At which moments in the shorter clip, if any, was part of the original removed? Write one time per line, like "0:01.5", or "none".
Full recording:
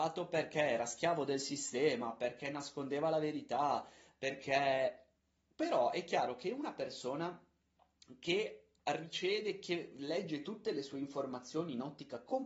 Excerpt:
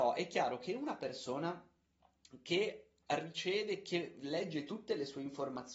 none

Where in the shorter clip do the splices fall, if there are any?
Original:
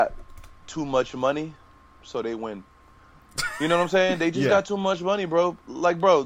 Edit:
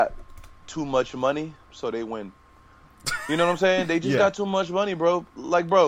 0:01.6

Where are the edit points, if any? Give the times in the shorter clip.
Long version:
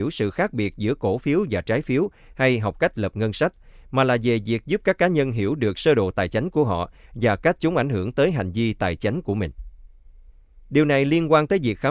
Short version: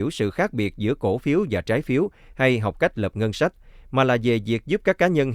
none

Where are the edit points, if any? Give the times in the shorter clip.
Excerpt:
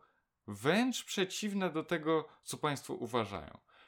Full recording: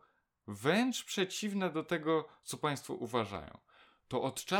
none

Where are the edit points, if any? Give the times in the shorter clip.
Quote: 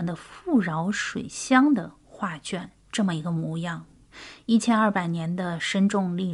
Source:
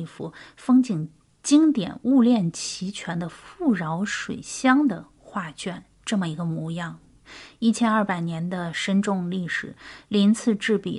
none

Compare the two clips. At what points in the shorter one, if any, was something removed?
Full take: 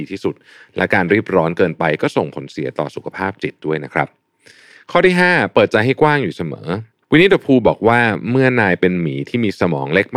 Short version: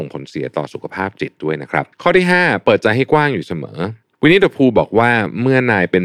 0:01.9

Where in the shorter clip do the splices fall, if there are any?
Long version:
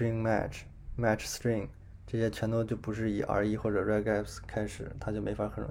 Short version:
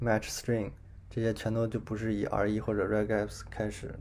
none

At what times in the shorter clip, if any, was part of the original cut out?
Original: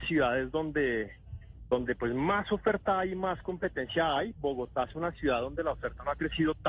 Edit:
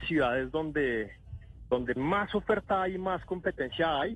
0:02.0

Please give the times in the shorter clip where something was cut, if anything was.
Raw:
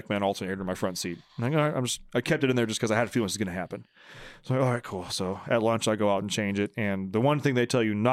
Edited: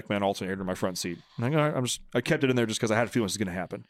none

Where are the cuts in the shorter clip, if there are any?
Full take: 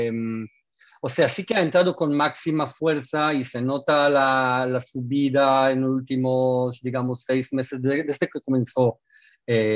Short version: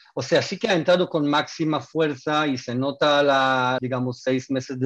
0:03.8

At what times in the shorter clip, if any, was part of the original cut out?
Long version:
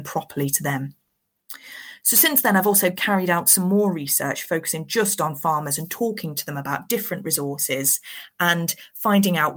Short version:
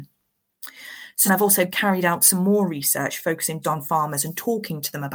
0:01.3
0:03.6

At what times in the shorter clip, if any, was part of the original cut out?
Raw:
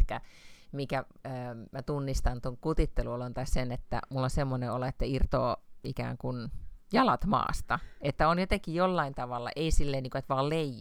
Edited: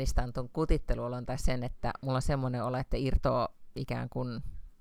none

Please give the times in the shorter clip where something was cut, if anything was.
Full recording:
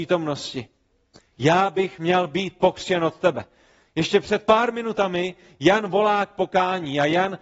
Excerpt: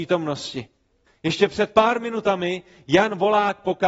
0:01.1

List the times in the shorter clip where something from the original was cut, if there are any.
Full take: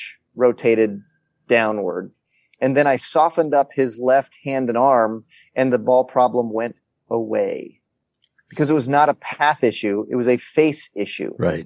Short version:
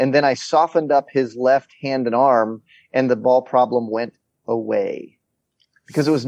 none

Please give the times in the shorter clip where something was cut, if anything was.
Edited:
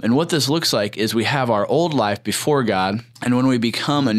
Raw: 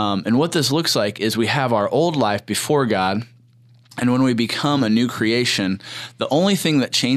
0:03.1

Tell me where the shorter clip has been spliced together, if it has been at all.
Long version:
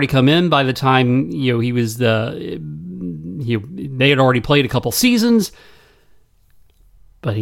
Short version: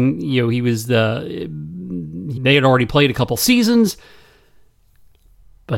0:02.4

